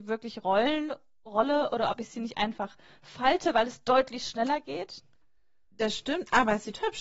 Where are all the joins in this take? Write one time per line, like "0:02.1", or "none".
none